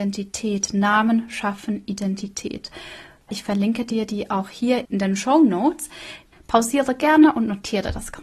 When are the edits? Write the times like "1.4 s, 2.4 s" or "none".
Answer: 3.3 s, 4.8 s, 6.3 s